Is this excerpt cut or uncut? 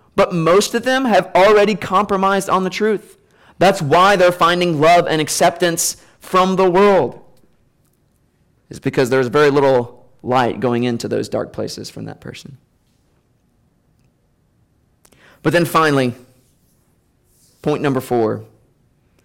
uncut